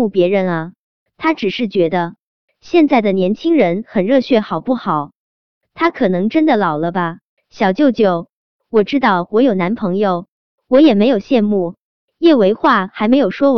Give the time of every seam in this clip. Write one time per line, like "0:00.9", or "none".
0:07.3